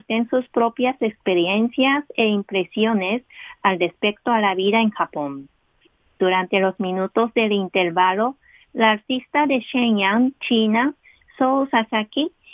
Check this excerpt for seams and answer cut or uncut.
uncut